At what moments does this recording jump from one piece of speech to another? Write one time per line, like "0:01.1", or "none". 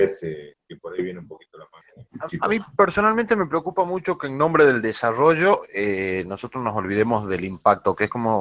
none